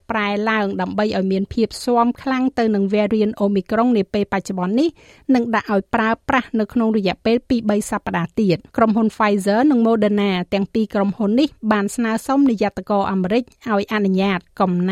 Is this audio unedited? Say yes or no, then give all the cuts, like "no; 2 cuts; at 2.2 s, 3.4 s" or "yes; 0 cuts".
no; 1 cut; at 8.7 s